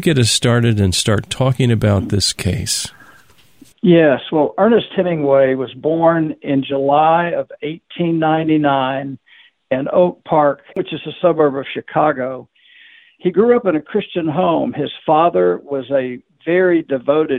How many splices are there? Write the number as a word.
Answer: one